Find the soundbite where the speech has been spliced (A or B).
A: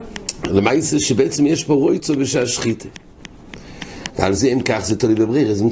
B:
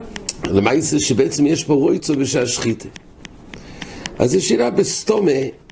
A